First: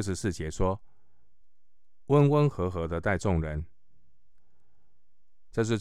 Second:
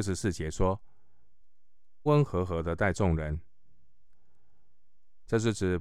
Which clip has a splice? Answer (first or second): second